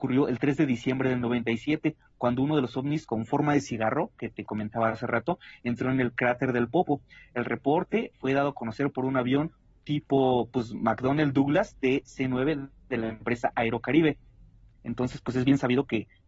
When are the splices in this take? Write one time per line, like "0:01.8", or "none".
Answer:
none